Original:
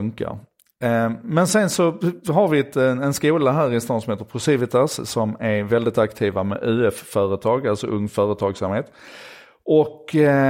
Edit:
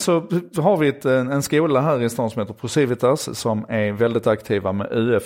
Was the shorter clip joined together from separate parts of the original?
no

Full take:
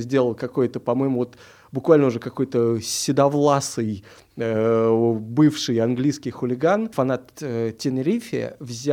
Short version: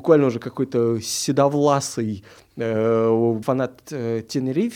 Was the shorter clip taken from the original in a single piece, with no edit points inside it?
no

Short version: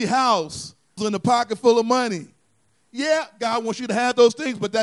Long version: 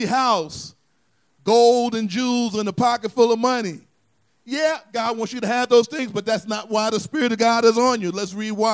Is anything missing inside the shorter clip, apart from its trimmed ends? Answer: yes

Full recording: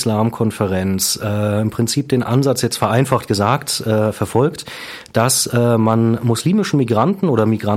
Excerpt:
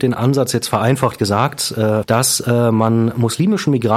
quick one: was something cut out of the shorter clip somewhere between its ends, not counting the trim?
yes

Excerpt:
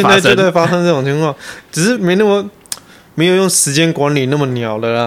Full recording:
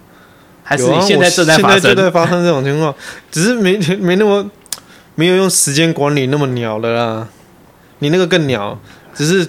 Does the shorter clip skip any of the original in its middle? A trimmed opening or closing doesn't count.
yes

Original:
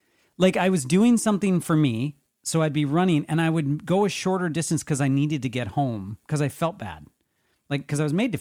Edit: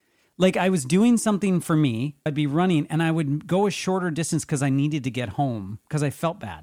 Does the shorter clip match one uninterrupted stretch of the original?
no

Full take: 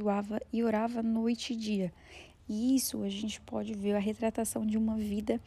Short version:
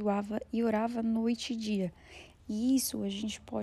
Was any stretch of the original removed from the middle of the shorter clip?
no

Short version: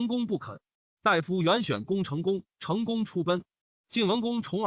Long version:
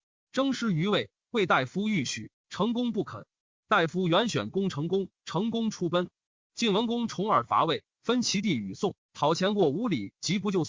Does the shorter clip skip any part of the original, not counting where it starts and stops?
no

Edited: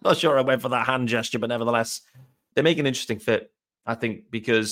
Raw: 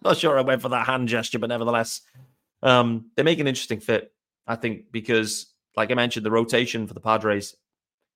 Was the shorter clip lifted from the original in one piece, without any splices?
no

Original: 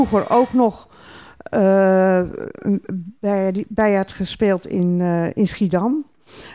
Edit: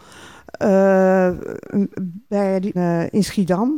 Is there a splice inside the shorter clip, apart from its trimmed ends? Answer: yes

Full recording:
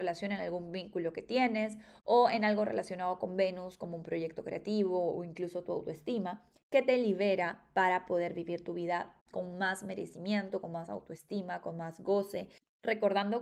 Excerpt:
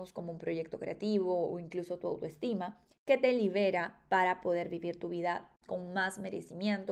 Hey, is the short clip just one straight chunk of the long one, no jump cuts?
yes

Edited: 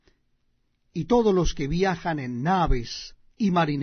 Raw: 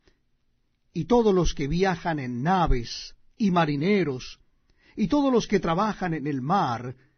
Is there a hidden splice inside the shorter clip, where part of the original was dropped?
no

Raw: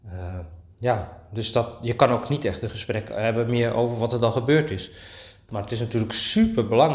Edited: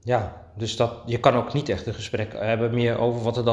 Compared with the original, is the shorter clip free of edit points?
yes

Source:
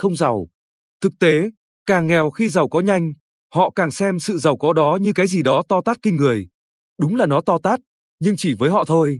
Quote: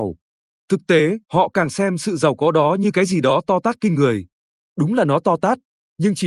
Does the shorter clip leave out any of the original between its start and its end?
yes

